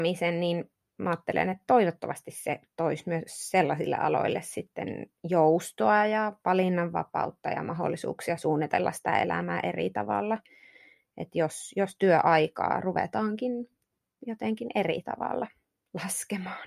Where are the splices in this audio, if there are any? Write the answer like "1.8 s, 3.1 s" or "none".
none